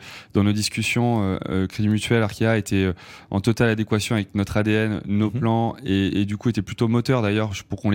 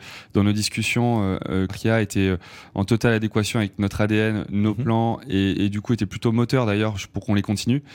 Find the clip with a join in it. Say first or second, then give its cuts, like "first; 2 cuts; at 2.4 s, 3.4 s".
second; 1 cut; at 1.7 s